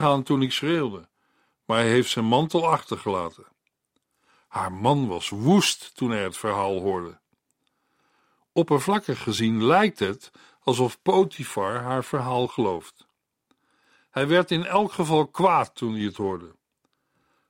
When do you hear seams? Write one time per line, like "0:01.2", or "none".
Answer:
none